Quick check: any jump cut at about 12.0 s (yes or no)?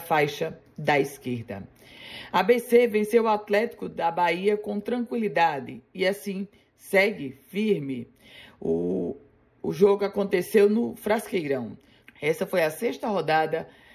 yes